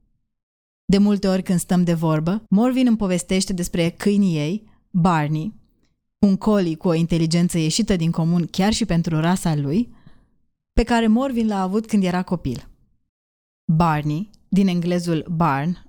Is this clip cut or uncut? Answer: cut